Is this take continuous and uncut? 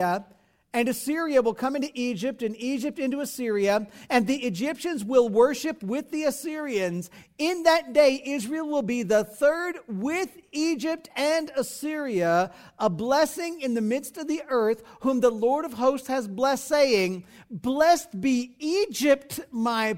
yes; 0 cuts

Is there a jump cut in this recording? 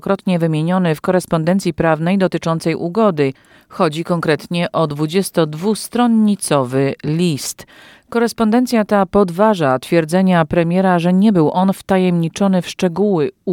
no; 0 cuts

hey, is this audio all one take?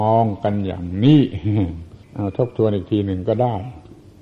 no; 1 cut; at 2.0 s

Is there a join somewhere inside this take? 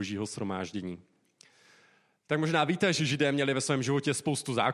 no; 0 cuts

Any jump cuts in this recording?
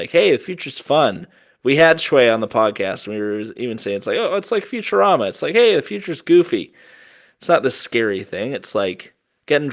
no; 0 cuts

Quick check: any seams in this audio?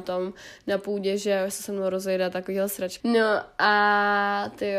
yes; 1 cut; at 3.0 s

